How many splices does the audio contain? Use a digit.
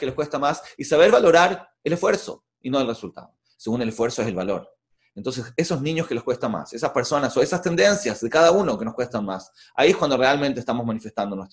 1